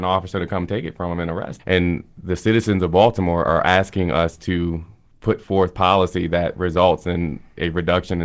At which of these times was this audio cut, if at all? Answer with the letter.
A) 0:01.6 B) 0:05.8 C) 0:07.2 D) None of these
A